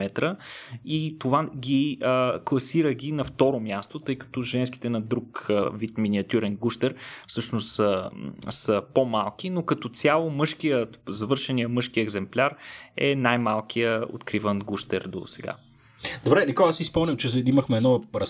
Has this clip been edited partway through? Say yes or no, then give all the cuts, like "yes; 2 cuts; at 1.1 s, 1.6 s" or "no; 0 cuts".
no; 0 cuts